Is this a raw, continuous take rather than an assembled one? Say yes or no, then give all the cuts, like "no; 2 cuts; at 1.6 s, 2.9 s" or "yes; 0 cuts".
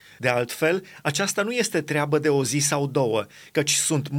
yes; 0 cuts